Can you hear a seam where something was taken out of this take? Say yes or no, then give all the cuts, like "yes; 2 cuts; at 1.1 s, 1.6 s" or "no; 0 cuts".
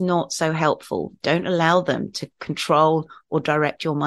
yes; 1 cut; at 1.2 s